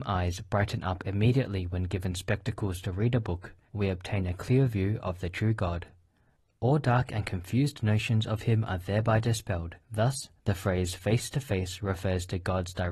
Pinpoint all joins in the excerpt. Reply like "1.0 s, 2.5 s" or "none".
3.7 s, 9.8 s